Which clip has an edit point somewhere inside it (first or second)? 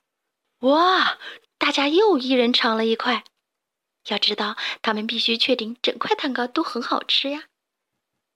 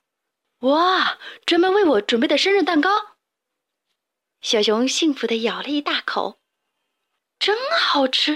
first